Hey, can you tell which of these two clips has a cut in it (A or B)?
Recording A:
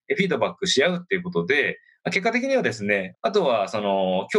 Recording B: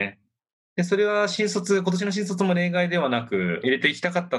A